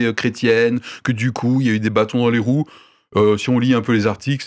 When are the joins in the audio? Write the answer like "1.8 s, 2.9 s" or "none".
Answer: none